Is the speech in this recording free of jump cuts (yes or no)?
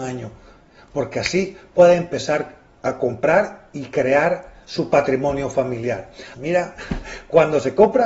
no